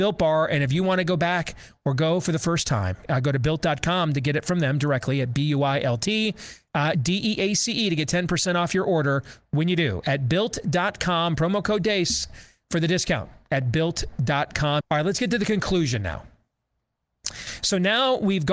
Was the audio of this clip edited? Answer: yes; 2 cuts; at 6.9 s, 14.8 s

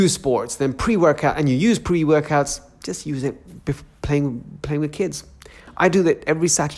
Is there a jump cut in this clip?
no; 0 cuts

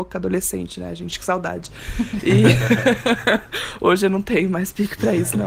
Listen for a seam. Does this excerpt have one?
no; 0 cuts

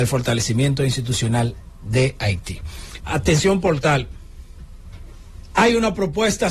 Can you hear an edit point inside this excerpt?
yes; 1 cut; at 3.0 s

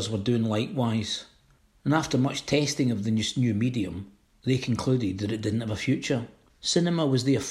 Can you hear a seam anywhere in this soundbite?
yes; 1 cut; at 6.5 s

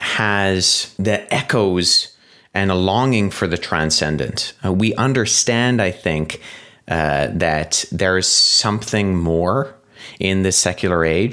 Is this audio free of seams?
yes; 0 cuts

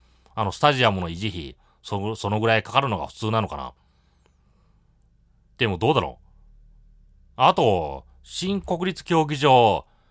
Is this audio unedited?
yes; 0 cuts

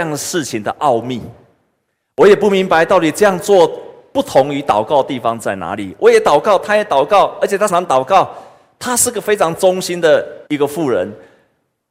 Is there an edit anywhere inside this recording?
yes; 2 cuts; at 7.7 s, 10.5 s

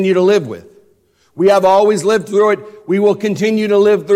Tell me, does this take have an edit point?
no; 0 cuts

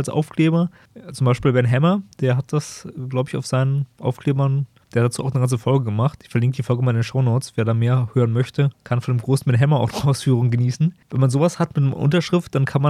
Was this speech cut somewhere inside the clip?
yes; 1 cut; at 11.0 s

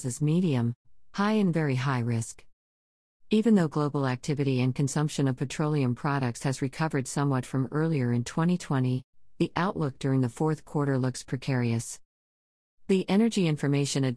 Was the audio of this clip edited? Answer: yes; 1 cut; at 3.2 s

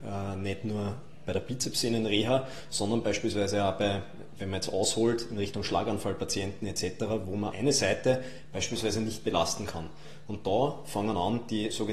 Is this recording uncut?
no; 1 cut; at 7.5 s

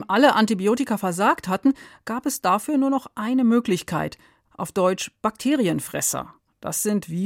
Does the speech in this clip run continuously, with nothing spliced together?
no; 1 cut; at 4.5 s

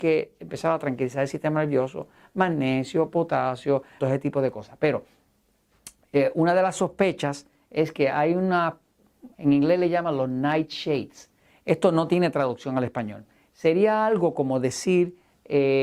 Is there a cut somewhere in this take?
yes; 2 cuts; at 4.0 s, 9.3 s

